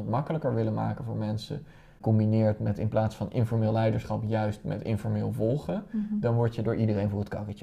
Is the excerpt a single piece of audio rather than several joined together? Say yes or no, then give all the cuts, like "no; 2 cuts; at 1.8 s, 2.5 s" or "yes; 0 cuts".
yes; 0 cuts